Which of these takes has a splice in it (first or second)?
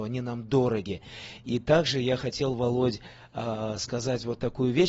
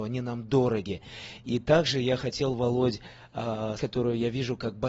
second